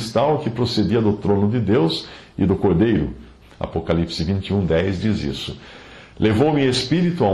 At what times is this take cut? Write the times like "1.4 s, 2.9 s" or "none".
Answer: 3.4 s